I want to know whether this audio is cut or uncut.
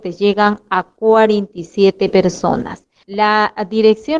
uncut